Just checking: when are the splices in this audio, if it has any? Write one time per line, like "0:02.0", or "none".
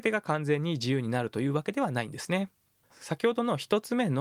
0:02.9